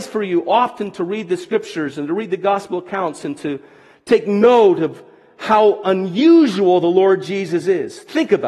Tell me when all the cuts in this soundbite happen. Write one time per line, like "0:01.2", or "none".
none